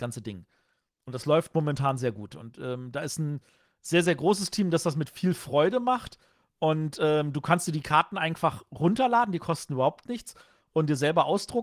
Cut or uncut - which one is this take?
uncut